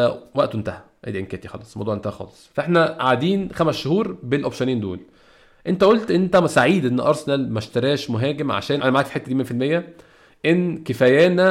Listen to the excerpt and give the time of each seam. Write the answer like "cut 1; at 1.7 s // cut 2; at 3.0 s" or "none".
cut 1; at 8.8 s